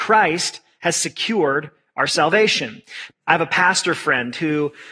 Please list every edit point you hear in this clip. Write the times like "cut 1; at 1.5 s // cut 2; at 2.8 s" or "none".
cut 1; at 3.1 s